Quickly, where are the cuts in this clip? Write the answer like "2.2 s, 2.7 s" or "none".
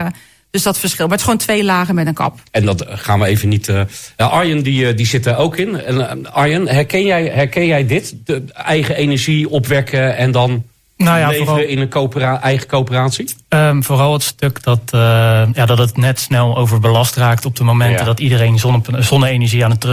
2.5 s